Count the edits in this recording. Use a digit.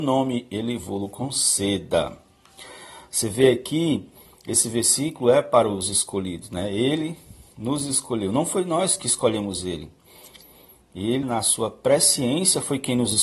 1